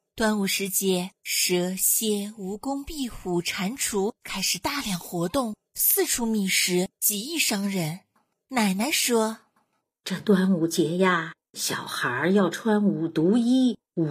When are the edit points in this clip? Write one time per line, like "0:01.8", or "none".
0:08.3

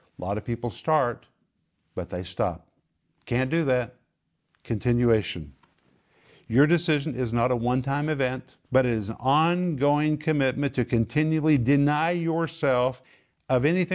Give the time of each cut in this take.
0:08.6

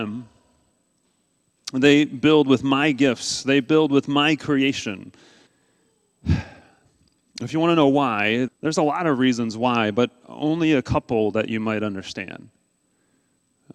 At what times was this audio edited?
0:05.5
0:08.5

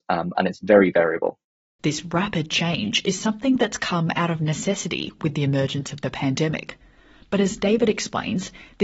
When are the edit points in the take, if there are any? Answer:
0:01.8

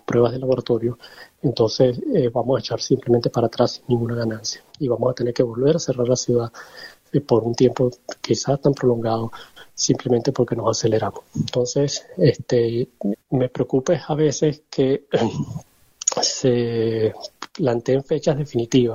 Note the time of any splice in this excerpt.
0:13.1

